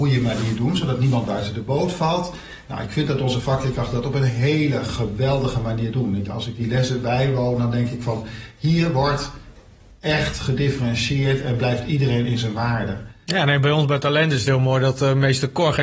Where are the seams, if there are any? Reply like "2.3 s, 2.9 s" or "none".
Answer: none

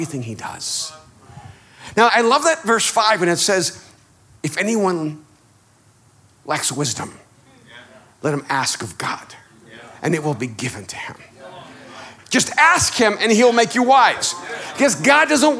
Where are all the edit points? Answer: 2.1 s, 12.2 s

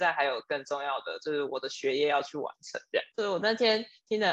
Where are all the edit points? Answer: 3.1 s

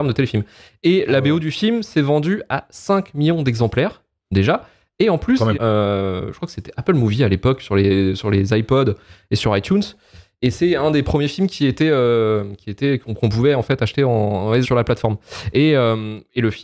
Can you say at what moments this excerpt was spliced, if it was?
5.5 s, 14.6 s

